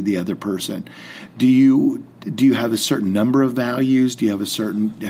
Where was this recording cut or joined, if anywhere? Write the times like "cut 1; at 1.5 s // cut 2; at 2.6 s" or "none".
none